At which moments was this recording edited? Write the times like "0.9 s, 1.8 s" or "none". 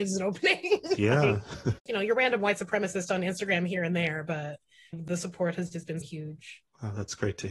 1.8 s, 4.9 s, 6.0 s